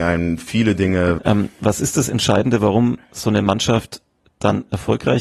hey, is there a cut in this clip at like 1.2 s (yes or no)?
yes